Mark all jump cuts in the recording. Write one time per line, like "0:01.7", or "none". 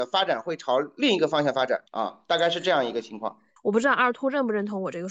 0:01.9
0:03.6